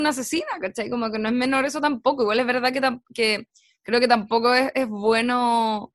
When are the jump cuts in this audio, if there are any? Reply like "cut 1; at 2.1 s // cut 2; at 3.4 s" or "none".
none